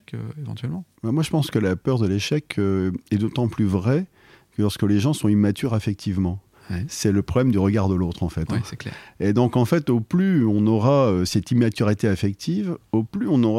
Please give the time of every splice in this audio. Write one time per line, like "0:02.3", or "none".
none